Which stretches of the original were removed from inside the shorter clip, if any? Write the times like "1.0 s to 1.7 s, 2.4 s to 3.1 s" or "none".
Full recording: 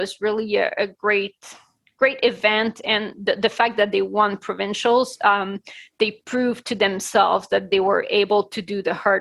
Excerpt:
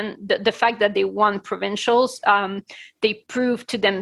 none

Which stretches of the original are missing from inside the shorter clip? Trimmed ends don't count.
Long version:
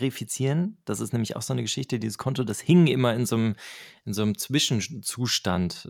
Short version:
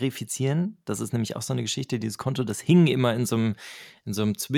none

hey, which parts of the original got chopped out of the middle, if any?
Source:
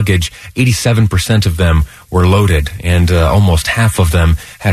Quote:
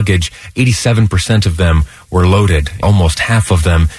2.8 s to 3.3 s

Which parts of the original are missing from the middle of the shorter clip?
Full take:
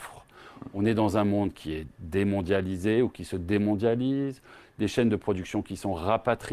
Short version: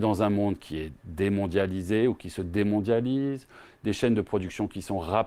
none

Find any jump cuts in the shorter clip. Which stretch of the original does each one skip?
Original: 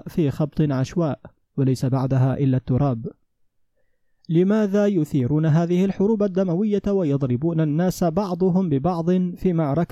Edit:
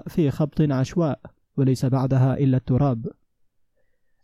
none

